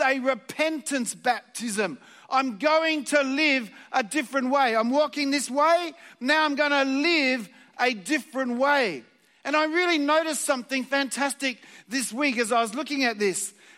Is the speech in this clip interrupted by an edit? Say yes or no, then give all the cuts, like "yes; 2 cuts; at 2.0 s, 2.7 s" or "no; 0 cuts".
no; 0 cuts